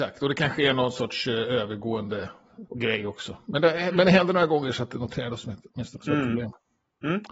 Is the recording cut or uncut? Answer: cut